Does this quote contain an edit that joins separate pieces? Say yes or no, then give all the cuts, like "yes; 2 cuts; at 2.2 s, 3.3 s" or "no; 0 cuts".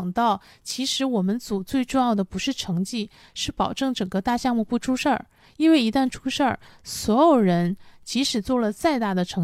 no; 0 cuts